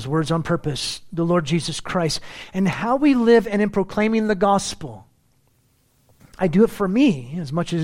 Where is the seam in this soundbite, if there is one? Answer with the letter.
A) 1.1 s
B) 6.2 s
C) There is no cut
B